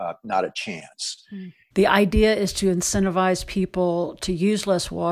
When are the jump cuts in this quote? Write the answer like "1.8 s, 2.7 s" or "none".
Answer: 1.7 s